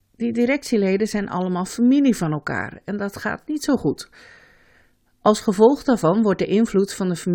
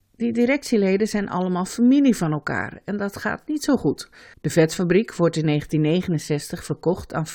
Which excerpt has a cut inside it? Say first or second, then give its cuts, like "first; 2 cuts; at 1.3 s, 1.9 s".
second; 1 cut; at 4.3 s